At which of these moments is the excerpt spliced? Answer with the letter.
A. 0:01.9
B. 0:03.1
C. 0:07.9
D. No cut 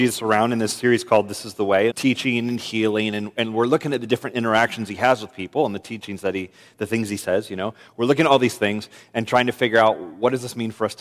A